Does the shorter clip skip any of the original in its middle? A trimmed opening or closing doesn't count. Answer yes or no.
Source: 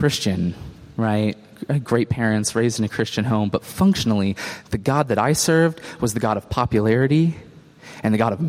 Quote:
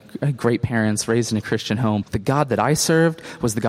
yes